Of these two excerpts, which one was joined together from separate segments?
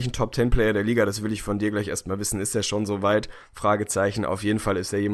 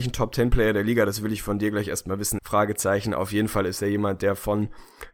second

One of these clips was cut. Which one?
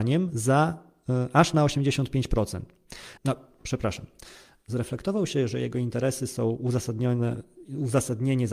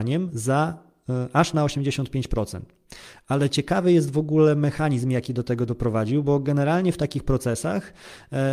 first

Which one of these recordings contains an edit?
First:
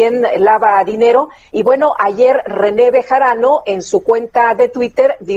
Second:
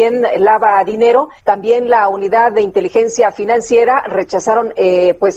second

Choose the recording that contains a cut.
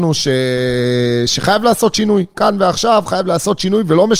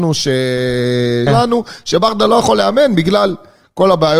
second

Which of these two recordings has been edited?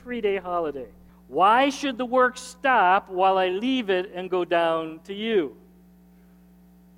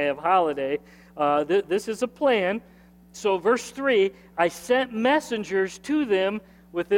first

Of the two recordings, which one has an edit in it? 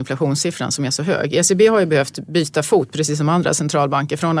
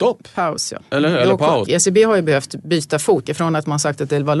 second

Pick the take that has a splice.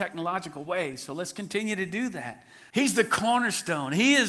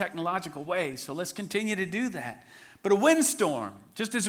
first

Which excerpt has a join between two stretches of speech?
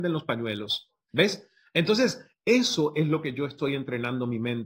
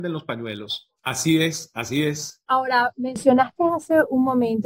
second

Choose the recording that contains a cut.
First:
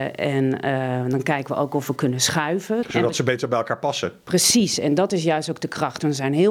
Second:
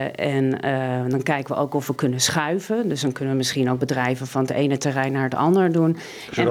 first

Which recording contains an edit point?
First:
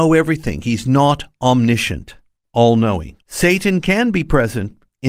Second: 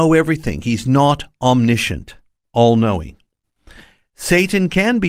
first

